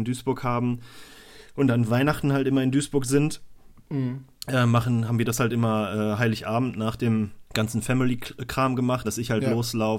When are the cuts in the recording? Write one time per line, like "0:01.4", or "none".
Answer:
0:07.5
0:09.0